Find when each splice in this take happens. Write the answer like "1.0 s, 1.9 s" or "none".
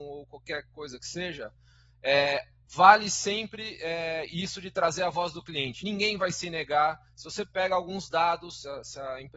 none

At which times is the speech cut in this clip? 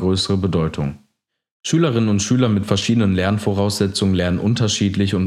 none

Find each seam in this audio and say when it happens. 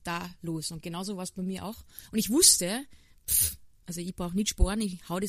none

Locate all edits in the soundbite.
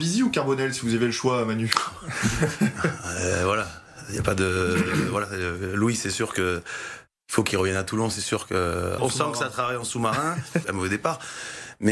9.0 s, 10.6 s

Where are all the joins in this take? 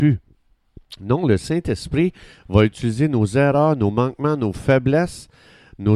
none

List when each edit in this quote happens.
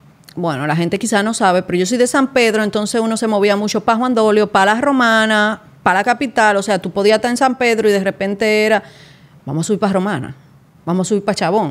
none

